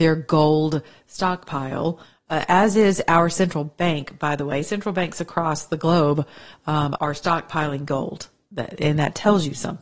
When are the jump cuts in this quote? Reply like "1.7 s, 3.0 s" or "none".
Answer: 7.0 s